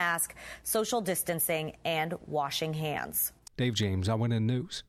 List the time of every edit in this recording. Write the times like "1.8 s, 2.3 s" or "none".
3.4 s